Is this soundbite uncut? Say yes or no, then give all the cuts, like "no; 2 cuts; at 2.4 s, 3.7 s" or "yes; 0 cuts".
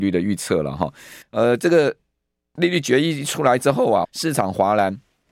no; 2 cuts; at 1.2 s, 4.0 s